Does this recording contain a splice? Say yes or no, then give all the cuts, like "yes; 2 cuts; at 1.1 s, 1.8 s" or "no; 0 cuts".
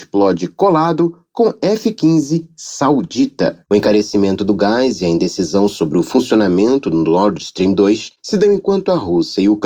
yes; 1 cut; at 3.6 s